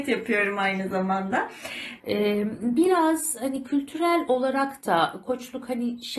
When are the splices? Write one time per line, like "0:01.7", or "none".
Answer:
0:02.0